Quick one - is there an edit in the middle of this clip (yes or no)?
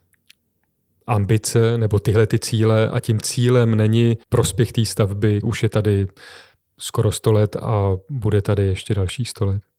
yes